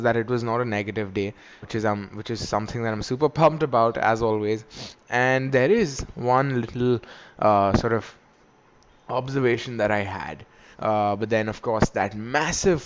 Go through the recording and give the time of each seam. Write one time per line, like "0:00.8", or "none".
0:01.6
0:10.7